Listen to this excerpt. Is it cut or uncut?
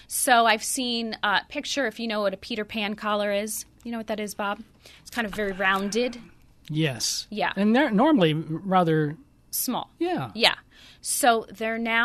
uncut